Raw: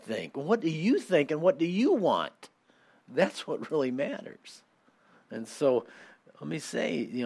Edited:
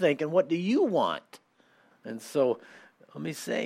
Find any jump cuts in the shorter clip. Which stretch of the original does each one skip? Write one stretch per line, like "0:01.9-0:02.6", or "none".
0:03.0-0:05.2